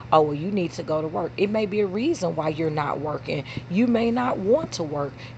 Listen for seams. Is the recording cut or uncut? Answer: uncut